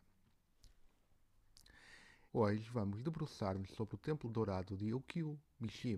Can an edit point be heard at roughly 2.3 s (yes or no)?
yes